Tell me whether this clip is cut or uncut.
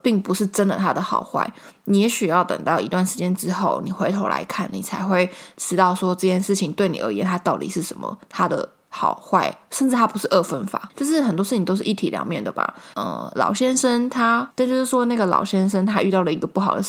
cut